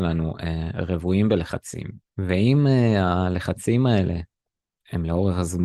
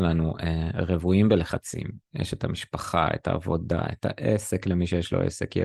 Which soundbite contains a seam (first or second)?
first